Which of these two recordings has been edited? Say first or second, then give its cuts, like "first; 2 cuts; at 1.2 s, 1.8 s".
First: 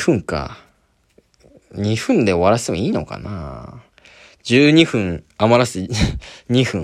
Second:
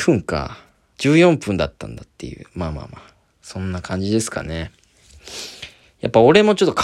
second; 1 cut; at 0.9 s